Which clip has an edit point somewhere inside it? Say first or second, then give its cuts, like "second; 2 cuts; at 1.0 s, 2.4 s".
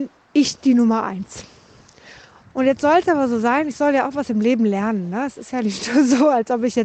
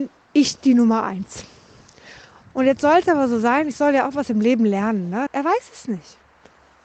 second; 1 cut; at 5.3 s